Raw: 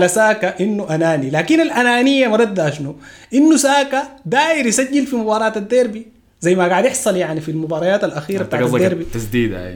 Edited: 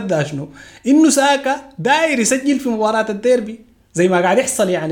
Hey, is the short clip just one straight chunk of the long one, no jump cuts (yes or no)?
yes